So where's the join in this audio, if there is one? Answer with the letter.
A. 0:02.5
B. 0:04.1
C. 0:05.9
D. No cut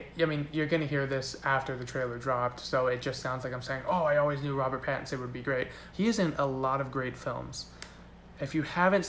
C